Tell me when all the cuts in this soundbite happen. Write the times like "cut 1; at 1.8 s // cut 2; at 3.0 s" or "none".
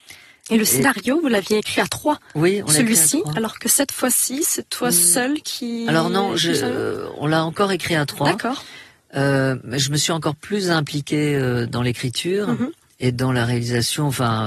none